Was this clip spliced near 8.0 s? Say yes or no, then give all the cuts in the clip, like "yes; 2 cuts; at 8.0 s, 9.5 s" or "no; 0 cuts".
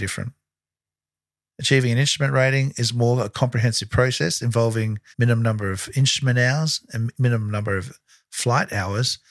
no; 2 cuts; at 1.5 s, 5.1 s